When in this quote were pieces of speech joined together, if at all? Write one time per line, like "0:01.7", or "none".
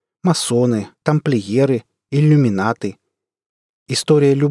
0:00.9